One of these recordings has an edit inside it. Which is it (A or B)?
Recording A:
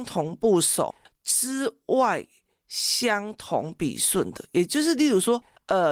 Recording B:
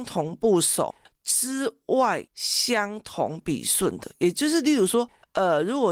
B